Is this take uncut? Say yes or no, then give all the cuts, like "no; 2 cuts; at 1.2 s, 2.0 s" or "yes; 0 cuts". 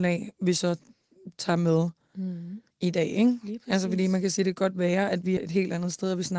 no; 2 cuts; at 2.7 s, 5.4 s